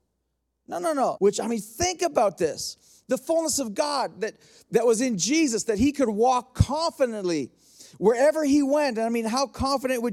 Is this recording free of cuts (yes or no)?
no